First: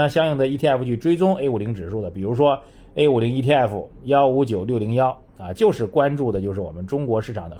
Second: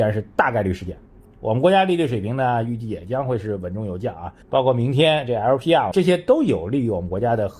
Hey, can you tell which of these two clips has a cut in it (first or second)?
second